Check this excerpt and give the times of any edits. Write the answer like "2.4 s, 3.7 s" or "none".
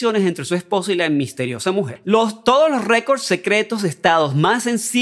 2.0 s